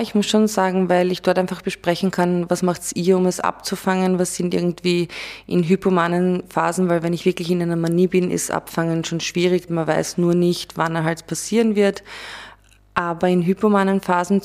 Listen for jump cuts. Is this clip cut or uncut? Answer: cut